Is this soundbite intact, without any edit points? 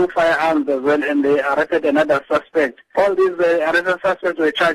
yes; 0 cuts

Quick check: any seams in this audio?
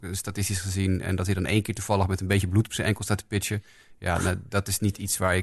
no; 0 cuts

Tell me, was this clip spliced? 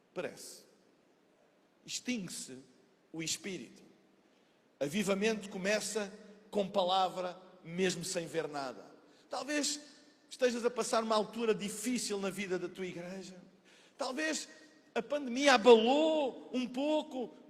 no; 0 cuts

